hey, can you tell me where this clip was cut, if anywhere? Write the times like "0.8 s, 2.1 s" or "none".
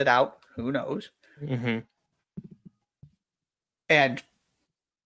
none